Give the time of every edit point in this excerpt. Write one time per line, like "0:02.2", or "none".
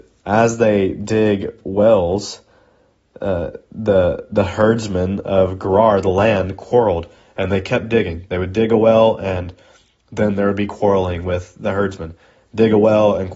none